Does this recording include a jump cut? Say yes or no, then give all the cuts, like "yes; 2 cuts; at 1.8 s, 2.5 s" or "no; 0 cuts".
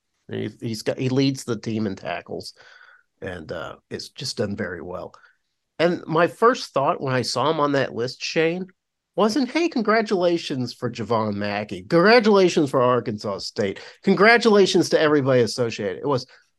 no; 0 cuts